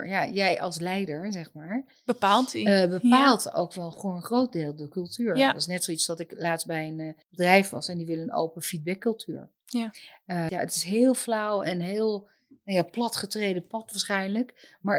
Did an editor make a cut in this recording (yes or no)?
yes